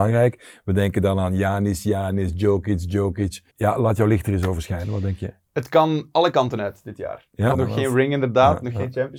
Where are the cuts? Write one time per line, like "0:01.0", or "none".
0:03.5
0:07.5